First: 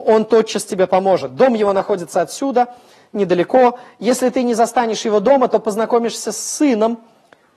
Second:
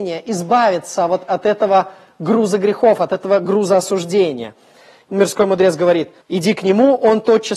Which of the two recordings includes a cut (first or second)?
second